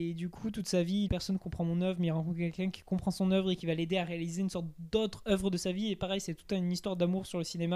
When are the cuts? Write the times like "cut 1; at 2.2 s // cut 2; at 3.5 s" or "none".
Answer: cut 1; at 1.1 s